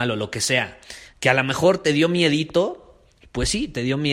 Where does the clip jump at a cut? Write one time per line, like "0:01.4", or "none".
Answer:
0:01.1